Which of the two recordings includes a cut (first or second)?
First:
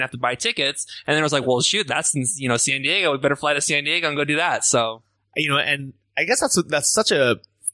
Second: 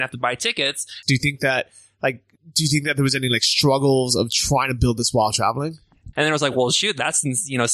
second